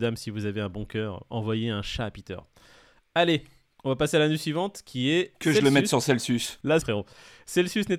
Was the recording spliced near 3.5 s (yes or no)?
no